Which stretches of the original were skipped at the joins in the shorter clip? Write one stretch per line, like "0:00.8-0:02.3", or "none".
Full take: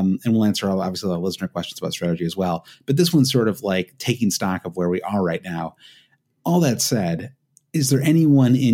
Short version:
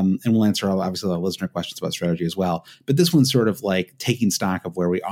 none

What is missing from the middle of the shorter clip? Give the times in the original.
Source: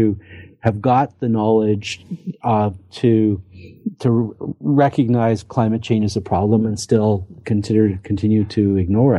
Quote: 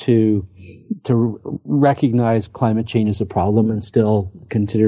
none

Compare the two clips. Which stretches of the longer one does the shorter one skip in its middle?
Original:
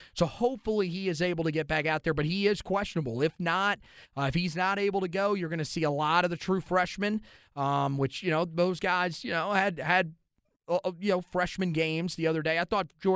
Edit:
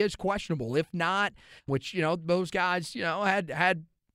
0:04.1-0:08.0

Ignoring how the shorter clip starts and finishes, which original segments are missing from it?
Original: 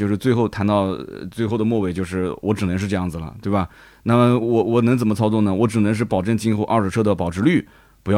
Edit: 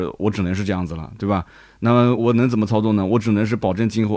0:04.4-0:04.6

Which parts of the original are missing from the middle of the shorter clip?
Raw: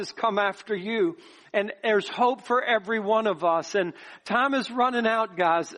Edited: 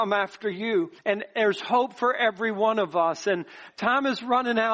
0:01.2-0:01.5

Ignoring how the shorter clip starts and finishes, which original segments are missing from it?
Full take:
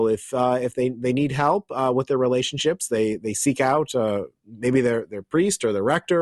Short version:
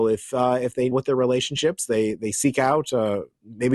0:00.9-0:01.9

